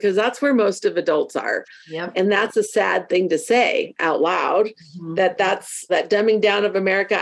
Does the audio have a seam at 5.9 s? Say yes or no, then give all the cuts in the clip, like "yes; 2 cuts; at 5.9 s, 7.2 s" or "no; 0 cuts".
yes; 1 cut; at 5.9 s